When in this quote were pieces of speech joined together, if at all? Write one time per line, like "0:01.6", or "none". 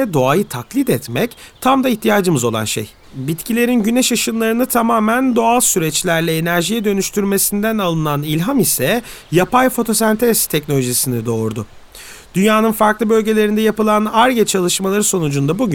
0:03.0